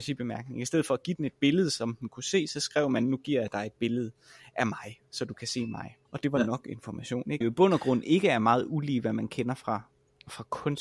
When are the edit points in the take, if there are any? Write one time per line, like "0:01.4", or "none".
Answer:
0:06.0
0:07.4